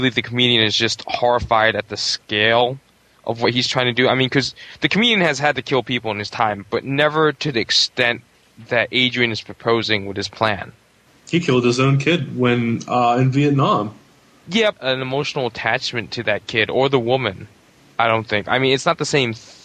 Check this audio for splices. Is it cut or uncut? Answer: cut